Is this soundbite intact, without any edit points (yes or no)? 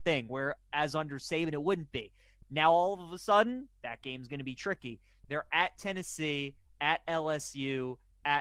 no